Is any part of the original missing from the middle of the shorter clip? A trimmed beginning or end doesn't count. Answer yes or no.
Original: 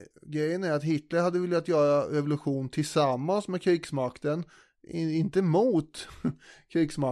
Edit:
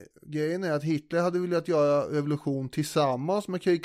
no